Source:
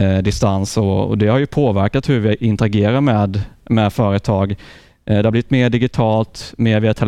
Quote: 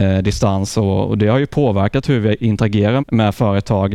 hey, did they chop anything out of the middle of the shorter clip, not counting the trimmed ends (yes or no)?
yes